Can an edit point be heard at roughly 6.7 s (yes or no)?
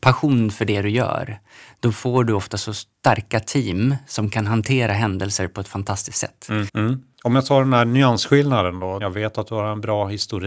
yes